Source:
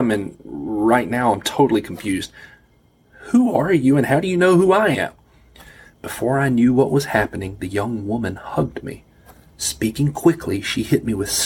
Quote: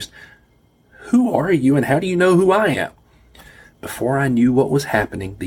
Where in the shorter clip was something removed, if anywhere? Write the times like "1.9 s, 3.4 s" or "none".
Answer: none